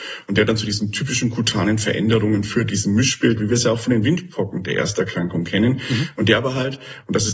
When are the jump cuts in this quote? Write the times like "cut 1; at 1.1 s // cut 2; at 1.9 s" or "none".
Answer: none